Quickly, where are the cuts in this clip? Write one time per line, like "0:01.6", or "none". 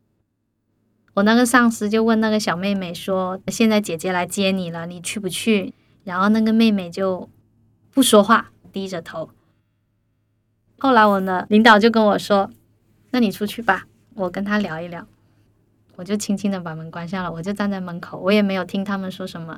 0:05.7